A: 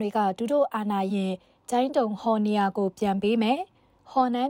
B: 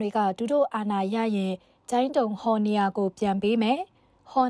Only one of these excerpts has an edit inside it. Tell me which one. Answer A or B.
A